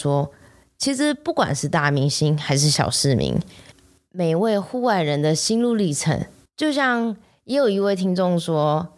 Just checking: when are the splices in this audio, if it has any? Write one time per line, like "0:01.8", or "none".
0:06.5